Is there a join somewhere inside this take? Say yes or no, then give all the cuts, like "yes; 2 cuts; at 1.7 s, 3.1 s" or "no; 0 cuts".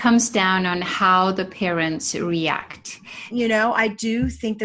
yes; 1 cut; at 3.3 s